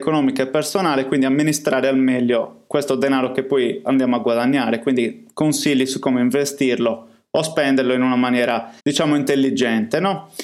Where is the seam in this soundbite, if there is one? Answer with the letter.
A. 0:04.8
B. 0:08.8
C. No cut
B